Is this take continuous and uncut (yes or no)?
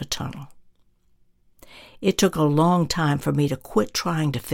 yes